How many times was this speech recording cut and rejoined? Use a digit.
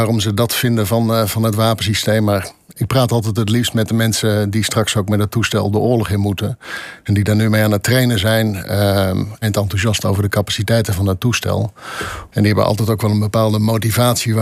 2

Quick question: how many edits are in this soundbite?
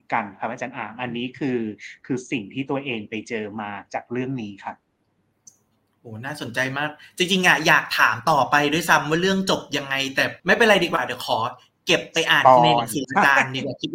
2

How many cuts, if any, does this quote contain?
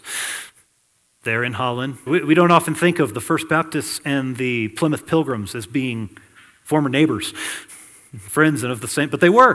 1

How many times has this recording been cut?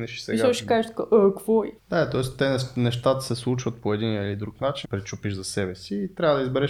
2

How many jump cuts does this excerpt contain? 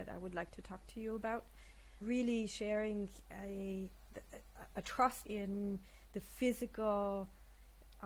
2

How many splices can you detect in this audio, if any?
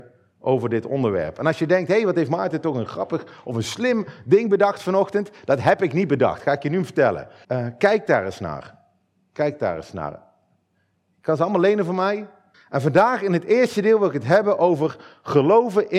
2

